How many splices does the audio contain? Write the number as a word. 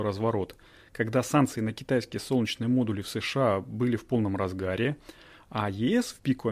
zero